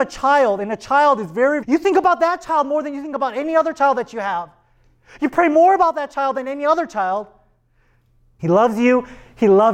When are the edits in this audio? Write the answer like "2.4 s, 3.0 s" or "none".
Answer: 1.6 s, 8.4 s